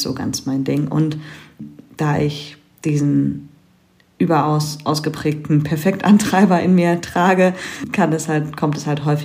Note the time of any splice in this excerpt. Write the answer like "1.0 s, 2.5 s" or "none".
none